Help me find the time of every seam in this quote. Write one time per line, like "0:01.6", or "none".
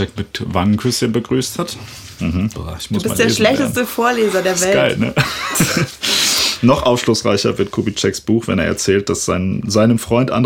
0:02.5